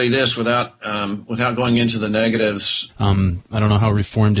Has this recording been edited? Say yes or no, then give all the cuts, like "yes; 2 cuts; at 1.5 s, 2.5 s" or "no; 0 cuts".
yes; 1 cut; at 2.9 s